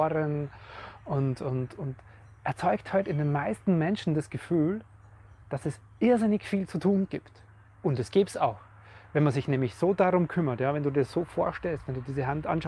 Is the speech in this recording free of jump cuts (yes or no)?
yes